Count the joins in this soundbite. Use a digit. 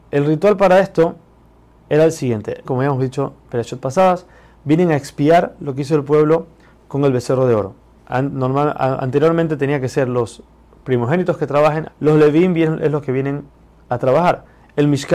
2